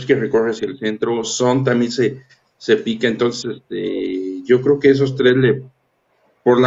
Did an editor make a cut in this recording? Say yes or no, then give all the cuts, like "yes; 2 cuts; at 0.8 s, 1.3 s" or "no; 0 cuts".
no; 0 cuts